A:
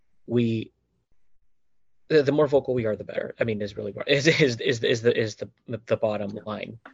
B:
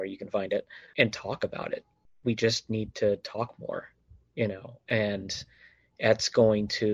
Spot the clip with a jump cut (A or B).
B